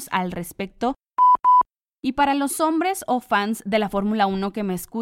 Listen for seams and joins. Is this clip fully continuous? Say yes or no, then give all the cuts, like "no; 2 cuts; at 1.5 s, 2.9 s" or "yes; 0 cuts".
yes; 0 cuts